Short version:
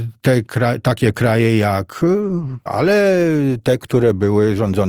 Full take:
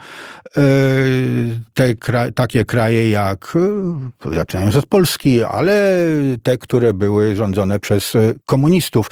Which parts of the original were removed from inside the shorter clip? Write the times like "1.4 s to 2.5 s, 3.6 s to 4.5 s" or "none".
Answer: 4.2 s to 5.5 s